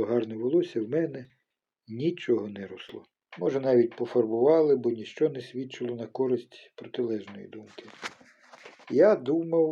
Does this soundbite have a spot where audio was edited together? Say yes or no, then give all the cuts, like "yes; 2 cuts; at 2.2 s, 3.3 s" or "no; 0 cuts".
yes; 1 cut; at 3.3 s